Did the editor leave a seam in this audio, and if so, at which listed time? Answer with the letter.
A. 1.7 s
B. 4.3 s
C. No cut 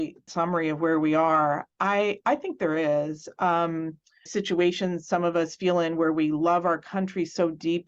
B